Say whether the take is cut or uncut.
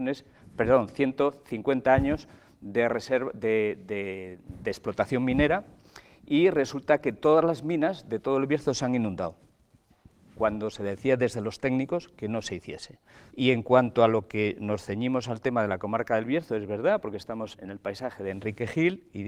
cut